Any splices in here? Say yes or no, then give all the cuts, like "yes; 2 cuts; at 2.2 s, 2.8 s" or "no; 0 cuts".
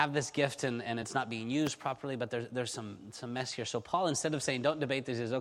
no; 0 cuts